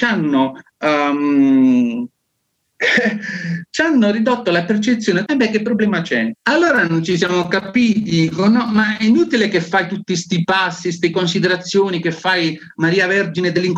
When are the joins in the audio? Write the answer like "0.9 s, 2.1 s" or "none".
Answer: 5.3 s, 6.3 s, 11.1 s